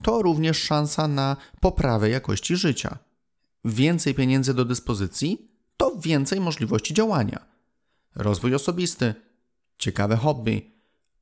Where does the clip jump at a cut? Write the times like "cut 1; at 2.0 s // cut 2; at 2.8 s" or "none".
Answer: none